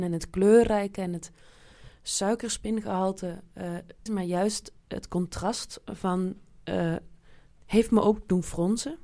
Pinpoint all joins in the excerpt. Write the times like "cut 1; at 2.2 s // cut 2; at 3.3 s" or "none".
cut 1; at 4.1 s // cut 2; at 7.6 s